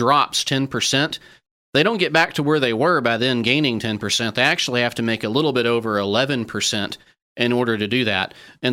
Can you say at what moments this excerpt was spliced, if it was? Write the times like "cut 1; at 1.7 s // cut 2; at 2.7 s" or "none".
none